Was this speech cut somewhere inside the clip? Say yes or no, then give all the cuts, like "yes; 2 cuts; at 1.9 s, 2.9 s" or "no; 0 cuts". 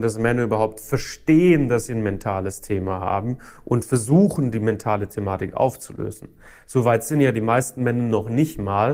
no; 0 cuts